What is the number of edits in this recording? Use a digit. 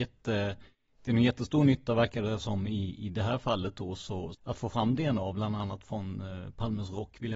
1